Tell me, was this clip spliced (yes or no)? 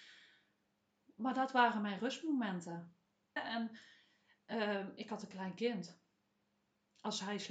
yes